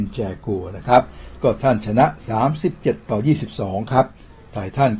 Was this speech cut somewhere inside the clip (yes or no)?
yes